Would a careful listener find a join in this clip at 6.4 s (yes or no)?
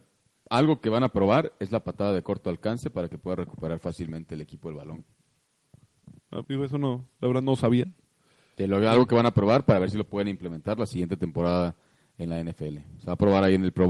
yes